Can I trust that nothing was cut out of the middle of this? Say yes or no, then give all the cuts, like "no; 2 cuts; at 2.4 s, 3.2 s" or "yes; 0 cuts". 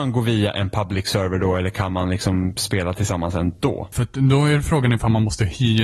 no; 1 cut; at 3.9 s